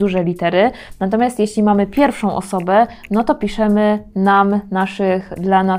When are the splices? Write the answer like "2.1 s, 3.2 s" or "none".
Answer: none